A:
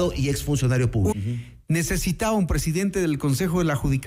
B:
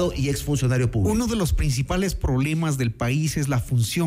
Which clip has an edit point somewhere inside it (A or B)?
A